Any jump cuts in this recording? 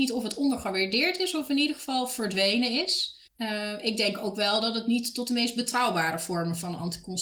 yes; 1 cut; at 3.3 s

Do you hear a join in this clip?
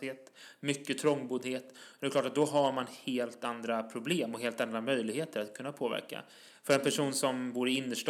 no; 0 cuts

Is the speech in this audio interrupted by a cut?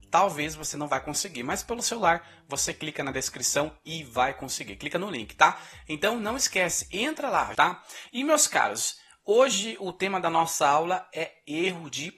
yes; 1 cut; at 7.5 s

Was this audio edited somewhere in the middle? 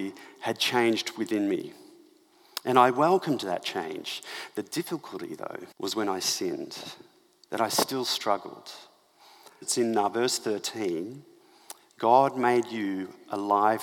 yes; 2 cuts; at 5.7 s, 9.6 s

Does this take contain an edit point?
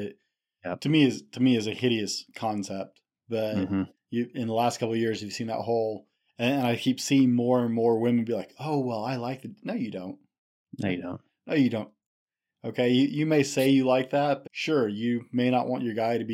yes; 1 cut; at 14.4 s

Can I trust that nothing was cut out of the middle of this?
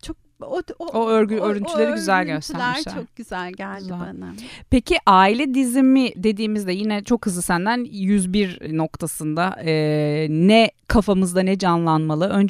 no; 1 cut; at 10.8 s

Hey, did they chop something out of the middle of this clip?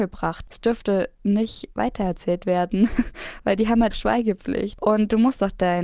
yes; 1 cut; at 3.9 s

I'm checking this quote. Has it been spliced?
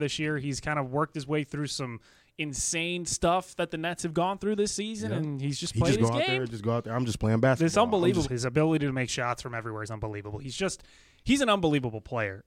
yes; 1 cut; at 8.2 s

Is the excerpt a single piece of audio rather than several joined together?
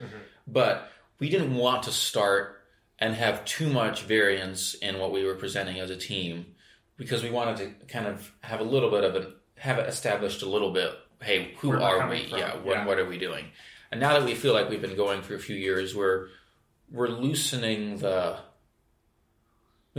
yes; 0 cuts

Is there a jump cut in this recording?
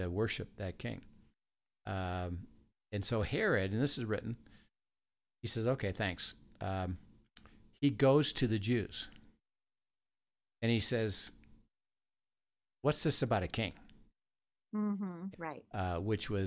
yes; 1 cut; at 15.3 s

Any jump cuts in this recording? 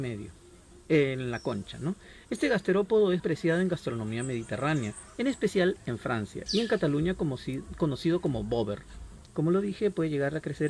yes; 3 cuts; at 3.2 s, 6.5 s, 9.3 s

